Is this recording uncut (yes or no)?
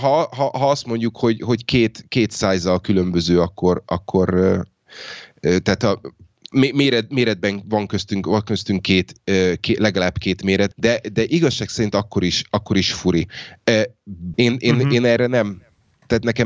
no